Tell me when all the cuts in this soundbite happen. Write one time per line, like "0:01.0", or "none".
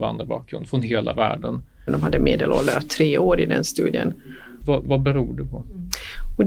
0:01.9
0:04.6